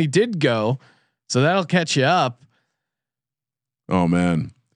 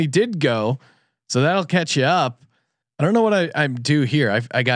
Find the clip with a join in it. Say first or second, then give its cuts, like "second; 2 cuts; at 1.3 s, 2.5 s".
second; 1 cut; at 2.8 s